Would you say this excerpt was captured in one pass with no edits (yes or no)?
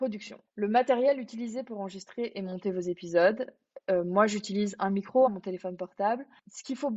no